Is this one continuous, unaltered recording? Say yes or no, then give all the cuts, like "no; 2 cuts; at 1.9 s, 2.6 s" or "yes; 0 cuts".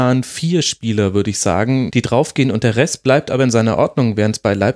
no; 1 cut; at 1.9 s